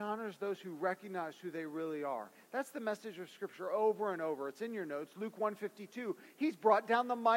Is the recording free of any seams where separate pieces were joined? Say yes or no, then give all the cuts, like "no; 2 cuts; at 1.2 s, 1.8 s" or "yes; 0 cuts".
yes; 0 cuts